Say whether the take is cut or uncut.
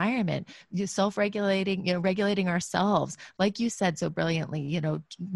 uncut